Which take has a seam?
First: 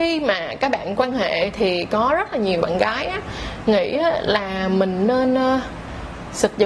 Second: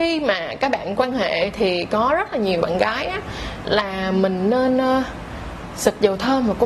second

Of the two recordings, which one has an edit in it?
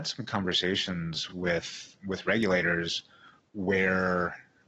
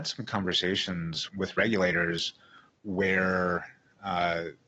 second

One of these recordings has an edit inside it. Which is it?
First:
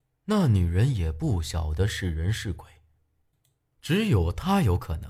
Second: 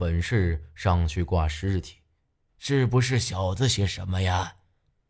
second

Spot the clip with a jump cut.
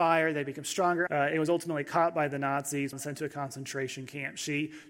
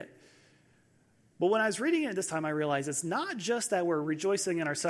first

